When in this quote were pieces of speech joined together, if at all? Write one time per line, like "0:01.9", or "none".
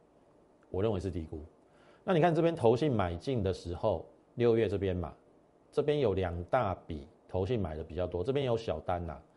0:04.2
0:07.2